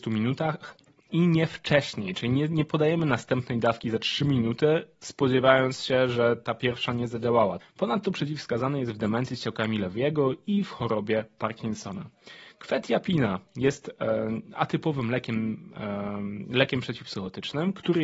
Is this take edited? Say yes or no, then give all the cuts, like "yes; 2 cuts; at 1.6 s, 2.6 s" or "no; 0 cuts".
yes; 1 cut; at 7.6 s